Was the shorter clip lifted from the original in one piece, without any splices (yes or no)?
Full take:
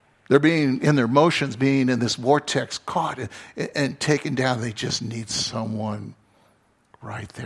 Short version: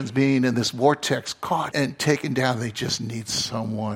no